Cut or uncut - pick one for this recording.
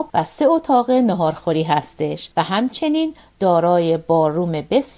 uncut